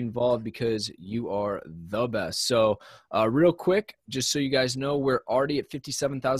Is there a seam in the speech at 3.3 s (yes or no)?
no